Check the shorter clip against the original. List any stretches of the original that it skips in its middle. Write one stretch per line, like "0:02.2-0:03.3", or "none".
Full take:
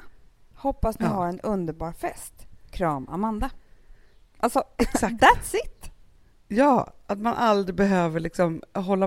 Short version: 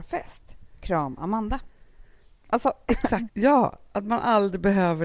0:05.2-0:06.4